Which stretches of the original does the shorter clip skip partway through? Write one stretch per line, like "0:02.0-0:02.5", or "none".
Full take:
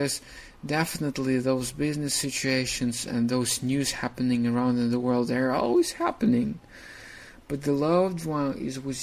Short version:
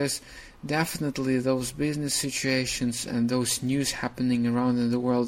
none